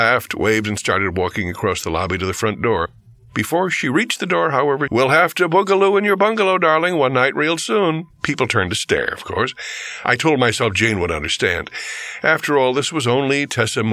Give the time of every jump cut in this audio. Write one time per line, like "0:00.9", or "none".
0:04.9
0:08.1